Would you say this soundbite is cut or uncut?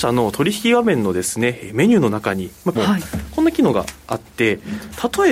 cut